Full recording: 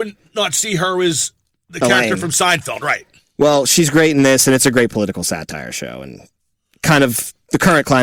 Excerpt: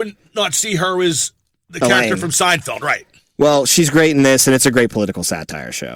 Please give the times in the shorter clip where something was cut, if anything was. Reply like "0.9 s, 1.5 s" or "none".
none